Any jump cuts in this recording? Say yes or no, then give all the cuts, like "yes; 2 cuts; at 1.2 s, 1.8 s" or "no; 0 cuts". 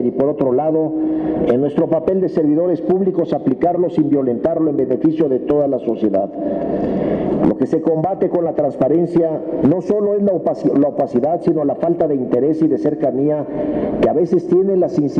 yes; 2 cuts; at 7.4 s, 9.6 s